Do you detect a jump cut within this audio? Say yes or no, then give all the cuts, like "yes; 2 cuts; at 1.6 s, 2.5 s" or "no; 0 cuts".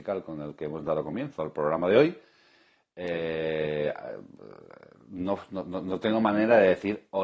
no; 0 cuts